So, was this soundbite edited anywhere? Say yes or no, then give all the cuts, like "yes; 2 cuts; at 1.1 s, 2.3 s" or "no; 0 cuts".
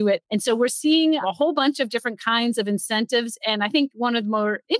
no; 0 cuts